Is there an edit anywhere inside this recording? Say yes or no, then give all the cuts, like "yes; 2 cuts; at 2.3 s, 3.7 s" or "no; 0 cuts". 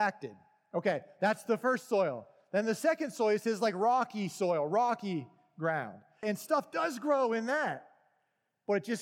yes; 1 cut; at 6.2 s